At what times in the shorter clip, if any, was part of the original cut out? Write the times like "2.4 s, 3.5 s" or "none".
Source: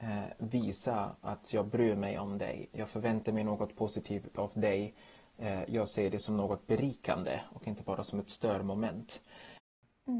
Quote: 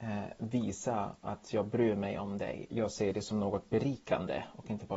2.7 s